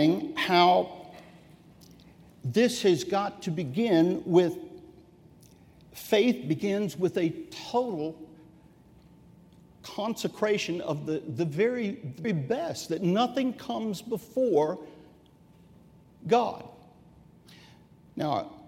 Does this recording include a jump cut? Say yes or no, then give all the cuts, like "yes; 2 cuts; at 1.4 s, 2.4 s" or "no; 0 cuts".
yes; 1 cut; at 12.2 s